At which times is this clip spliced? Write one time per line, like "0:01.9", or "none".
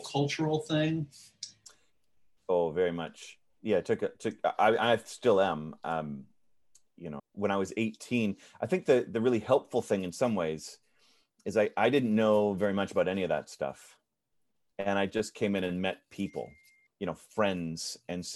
0:07.2
0:16.9